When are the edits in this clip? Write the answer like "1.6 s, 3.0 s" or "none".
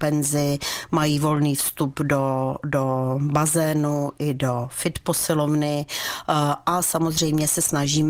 none

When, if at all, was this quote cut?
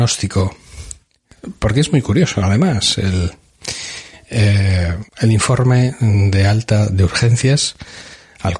5.1 s

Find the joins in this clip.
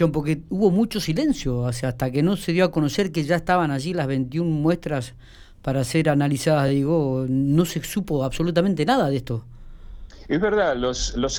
none

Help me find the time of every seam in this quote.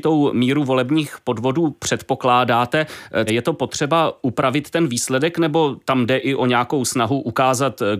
3.3 s

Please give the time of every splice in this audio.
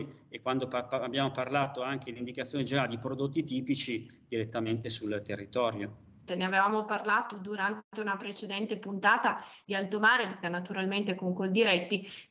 6.3 s, 10.4 s

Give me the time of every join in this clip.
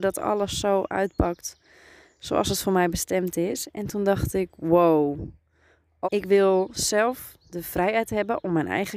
6.0 s

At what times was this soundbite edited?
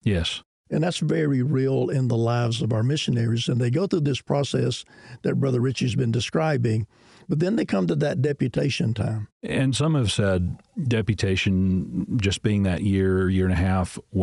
9.3 s

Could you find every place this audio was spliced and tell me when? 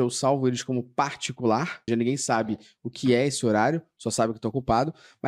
1.9 s

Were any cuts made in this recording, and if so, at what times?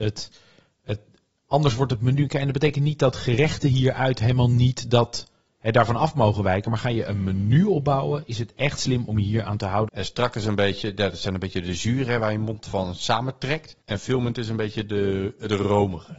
9.9 s, 13.8 s

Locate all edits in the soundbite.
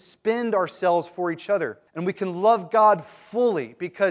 1.9 s

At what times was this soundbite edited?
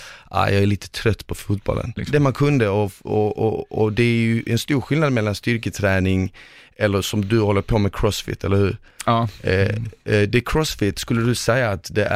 2.0 s

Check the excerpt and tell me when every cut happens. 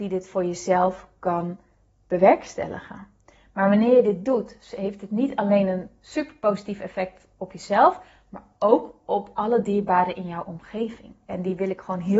11.3 s

